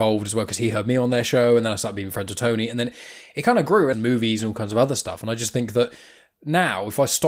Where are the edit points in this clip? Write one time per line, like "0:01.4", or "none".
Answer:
0:03.9